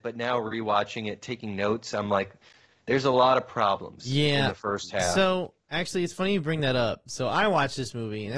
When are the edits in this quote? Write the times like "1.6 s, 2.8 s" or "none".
none